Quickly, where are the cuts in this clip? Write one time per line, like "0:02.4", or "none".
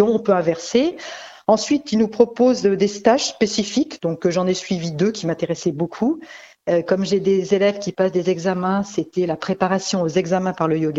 none